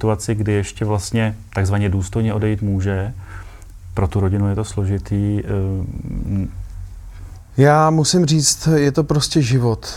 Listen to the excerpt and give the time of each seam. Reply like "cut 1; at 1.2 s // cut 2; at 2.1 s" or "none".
none